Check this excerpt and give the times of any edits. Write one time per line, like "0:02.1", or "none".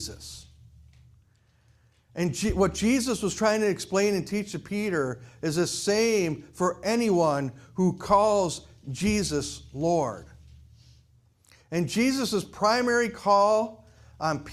none